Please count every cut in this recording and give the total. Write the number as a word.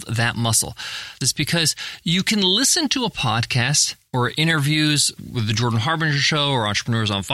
three